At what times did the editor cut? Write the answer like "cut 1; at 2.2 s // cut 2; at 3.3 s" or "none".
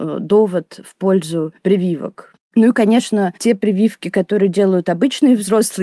none